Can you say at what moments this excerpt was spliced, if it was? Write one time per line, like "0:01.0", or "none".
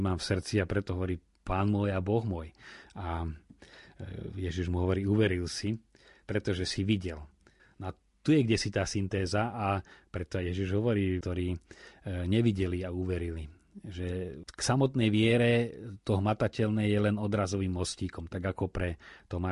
0:07.6
0:11.2